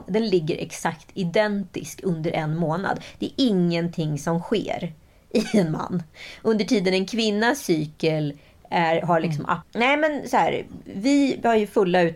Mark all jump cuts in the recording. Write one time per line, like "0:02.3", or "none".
0:09.6